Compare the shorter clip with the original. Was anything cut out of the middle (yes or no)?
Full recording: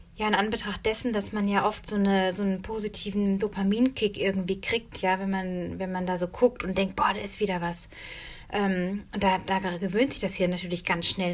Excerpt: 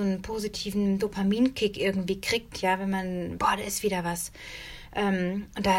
yes